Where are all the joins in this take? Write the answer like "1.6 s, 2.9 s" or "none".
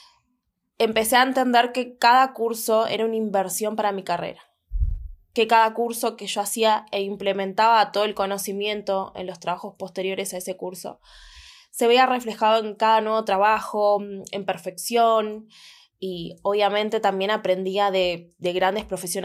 none